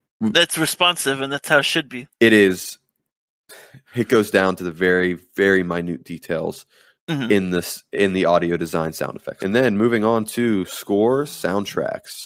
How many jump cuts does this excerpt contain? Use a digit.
1